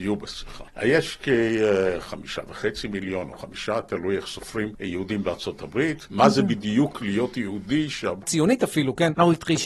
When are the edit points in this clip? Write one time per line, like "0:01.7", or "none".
0:06.1
0:08.2